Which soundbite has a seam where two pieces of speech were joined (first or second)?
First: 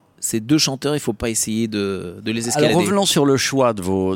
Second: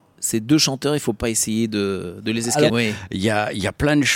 second